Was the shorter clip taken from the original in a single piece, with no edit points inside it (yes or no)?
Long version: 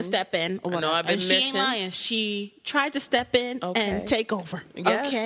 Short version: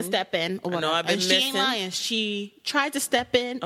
yes